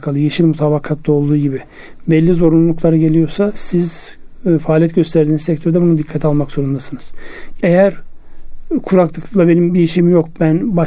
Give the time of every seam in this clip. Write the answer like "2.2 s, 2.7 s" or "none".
7.6 s

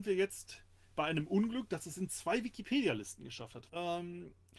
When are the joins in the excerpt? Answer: 3.7 s

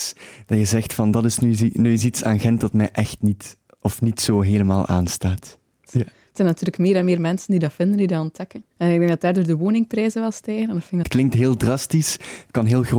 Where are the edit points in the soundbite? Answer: 5.9 s, 8.7 s, 11.0 s

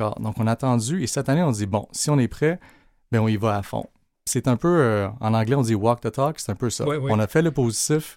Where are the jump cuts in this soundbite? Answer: none

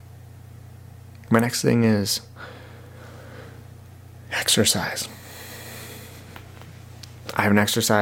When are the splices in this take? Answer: none

